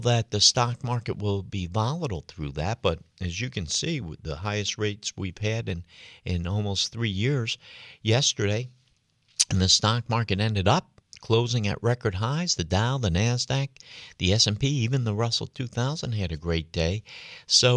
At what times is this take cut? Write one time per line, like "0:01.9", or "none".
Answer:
none